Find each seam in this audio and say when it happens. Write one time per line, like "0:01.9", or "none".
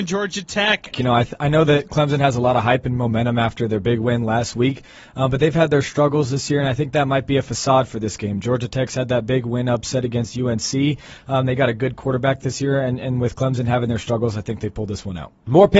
0:00.9